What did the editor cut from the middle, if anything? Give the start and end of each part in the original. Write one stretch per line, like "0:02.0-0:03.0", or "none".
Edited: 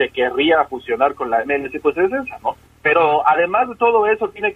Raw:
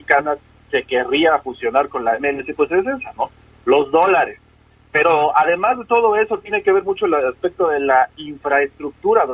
0:03.4-0:04.8